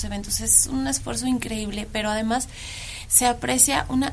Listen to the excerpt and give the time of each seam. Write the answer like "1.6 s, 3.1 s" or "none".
none